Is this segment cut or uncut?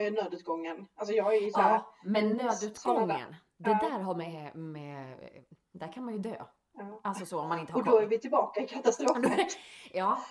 uncut